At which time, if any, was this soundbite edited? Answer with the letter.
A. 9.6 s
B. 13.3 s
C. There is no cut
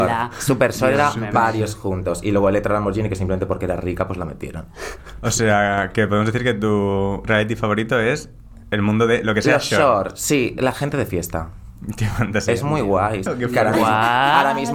B